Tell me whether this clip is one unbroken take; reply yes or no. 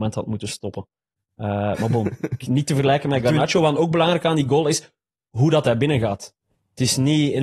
yes